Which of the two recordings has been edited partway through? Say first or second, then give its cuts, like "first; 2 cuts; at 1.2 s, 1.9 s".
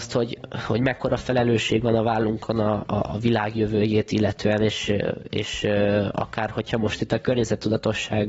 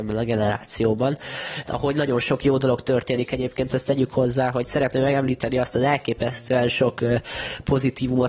second; 1 cut; at 1.7 s